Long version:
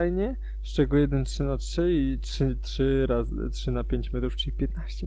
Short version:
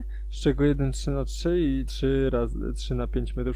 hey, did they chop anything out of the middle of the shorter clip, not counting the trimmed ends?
yes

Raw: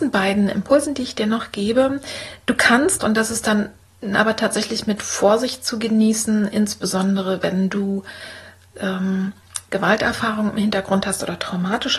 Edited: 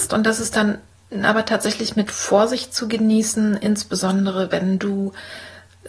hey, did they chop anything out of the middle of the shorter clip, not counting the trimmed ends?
no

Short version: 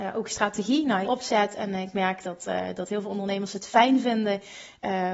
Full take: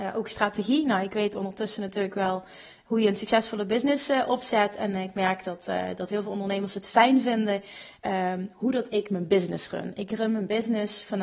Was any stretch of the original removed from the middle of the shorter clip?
yes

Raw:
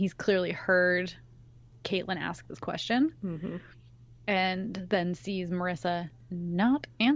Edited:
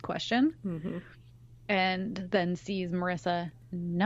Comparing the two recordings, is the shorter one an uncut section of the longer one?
yes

